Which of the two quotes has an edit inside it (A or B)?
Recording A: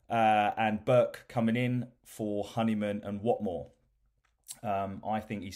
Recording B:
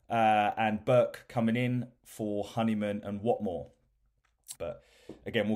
B